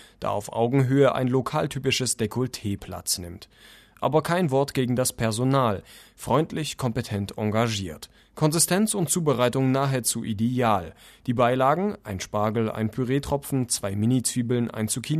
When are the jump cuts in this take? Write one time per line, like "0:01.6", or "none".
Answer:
0:08.2